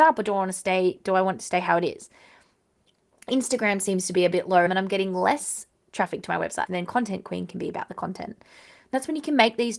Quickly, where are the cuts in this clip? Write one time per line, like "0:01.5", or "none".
0:04.7
0:06.7